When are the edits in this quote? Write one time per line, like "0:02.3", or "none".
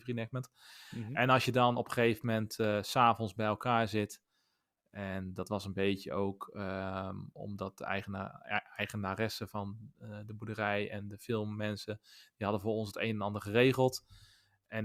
none